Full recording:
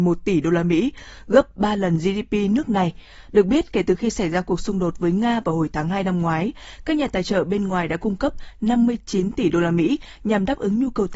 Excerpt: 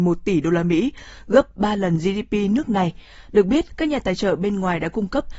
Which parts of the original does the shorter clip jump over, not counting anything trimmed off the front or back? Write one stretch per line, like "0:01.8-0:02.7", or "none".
0:03.7-0:06.8